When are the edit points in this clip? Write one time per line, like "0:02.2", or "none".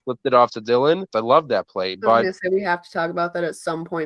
0:01.1